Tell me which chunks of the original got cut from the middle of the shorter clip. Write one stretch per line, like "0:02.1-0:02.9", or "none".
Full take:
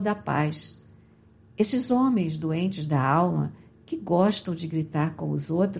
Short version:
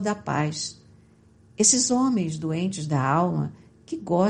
none